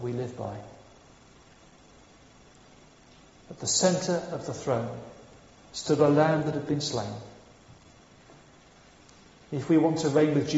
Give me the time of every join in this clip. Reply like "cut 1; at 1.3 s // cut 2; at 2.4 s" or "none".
none